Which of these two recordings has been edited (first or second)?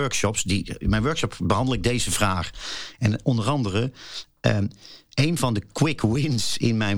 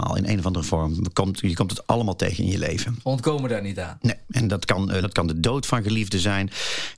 second